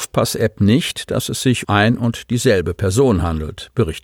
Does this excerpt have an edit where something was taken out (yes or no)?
yes